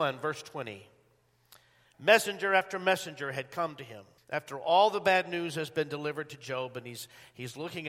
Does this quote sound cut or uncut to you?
cut